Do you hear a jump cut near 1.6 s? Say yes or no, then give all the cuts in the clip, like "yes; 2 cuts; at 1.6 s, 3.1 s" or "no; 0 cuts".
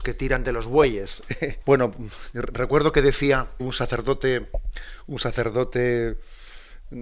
yes; 2 cuts; at 1.6 s, 3.6 s